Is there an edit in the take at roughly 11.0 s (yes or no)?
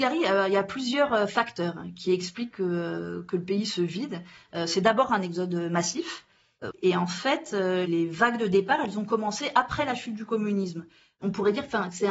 no